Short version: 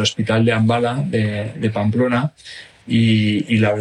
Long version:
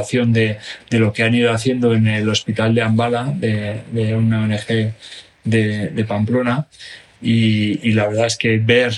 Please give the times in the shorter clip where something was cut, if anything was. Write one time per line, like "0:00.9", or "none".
0:01.5